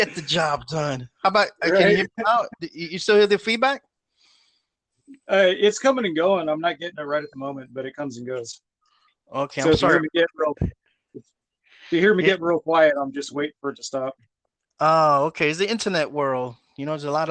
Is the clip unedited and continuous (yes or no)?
yes